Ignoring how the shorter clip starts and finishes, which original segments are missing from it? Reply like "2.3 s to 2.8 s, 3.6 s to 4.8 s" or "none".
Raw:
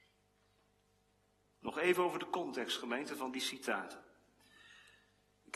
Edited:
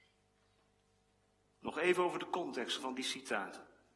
2.8 s to 3.1 s

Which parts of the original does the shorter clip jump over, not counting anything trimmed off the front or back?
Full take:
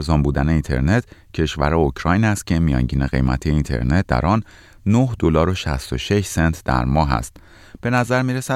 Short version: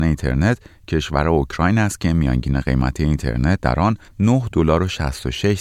4.5 s to 4.7 s

